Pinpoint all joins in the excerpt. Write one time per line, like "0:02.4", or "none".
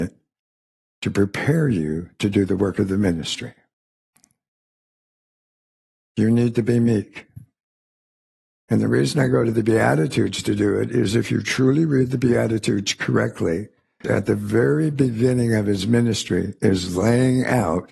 0:14.0